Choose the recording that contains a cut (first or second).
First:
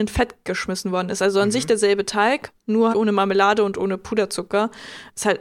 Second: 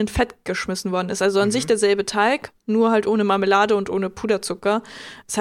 first